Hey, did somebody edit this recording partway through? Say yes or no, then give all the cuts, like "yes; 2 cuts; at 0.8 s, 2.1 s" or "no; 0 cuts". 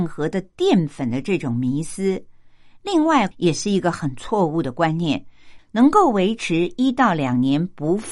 yes; 2 cuts; at 3.3 s, 5.6 s